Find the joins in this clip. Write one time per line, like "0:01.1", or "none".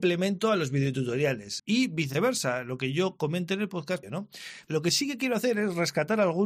0:01.6
0:04.0